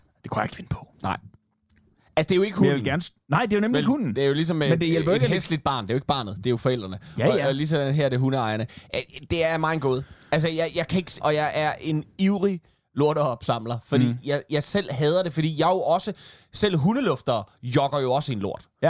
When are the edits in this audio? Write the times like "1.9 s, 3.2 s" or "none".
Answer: 11.2 s